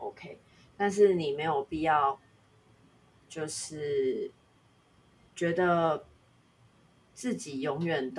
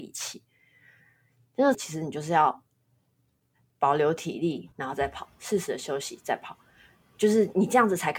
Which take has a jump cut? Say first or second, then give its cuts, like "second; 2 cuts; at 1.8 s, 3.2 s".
second; 2 cuts; at 1.7 s, 4.7 s